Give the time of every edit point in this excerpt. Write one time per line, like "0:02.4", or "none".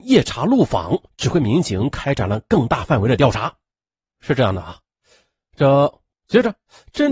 0:04.0
0:06.1